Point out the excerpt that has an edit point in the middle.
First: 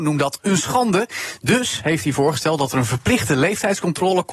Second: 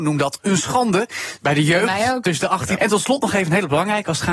second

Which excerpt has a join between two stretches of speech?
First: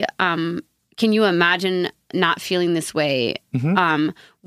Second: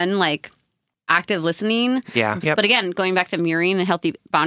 second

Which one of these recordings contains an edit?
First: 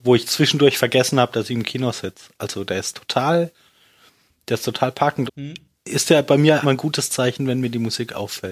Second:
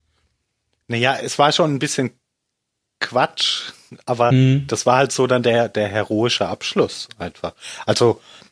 first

